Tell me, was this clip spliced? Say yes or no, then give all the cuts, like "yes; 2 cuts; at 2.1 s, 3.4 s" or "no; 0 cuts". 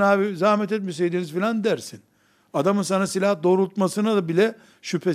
no; 0 cuts